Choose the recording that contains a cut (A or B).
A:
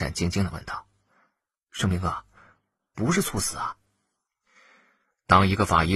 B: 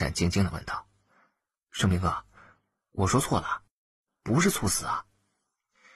A